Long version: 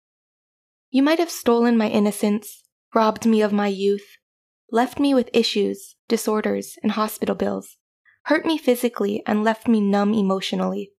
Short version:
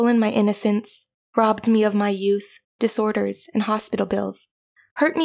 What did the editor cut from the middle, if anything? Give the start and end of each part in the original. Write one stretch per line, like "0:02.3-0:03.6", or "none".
0:04.3-0:06.0